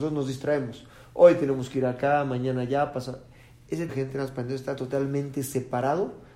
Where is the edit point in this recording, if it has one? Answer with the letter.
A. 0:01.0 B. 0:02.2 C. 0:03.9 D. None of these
C